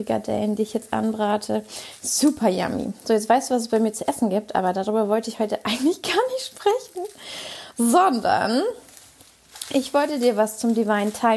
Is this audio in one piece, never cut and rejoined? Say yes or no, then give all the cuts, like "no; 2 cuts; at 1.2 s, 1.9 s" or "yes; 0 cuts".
yes; 0 cuts